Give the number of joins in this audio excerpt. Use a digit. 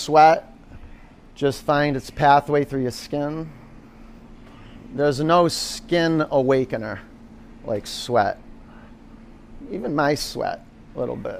0